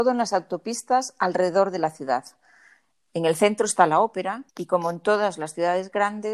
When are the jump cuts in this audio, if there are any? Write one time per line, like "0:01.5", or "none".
0:03.1
0:04.5